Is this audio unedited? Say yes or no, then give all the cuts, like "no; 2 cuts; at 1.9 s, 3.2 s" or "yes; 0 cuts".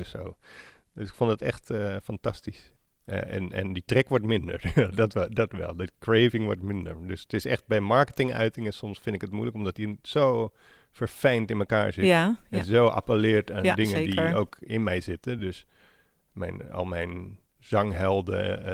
yes; 0 cuts